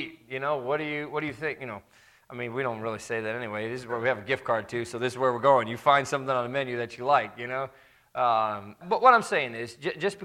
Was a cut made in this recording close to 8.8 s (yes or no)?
yes